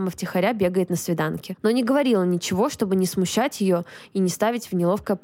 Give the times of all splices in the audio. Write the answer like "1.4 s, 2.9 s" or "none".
none